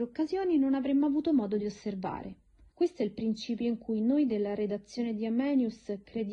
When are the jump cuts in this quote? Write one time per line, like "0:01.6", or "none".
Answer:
0:02.7